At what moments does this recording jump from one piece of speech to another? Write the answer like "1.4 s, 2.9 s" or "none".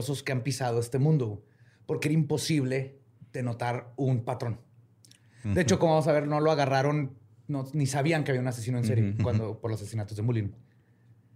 none